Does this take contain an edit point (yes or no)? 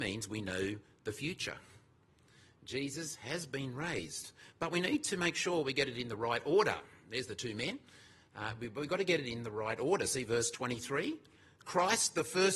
no